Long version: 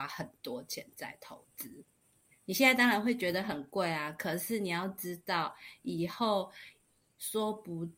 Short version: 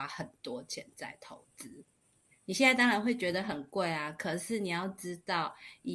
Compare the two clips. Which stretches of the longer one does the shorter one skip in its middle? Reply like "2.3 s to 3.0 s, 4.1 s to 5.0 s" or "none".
none